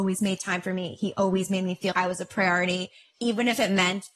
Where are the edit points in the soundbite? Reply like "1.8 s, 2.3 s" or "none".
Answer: 1.9 s